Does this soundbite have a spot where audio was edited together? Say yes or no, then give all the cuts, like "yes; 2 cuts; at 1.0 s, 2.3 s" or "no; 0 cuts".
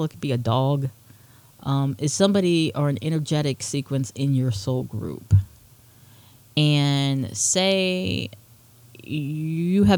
no; 0 cuts